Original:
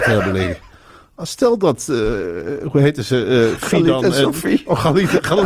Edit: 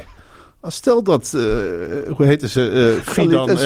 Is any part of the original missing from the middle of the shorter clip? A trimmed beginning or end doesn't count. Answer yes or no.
no